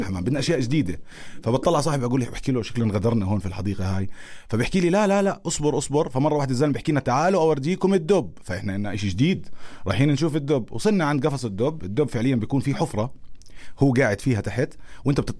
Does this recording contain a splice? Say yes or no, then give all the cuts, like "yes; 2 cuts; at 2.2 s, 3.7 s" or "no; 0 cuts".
no; 0 cuts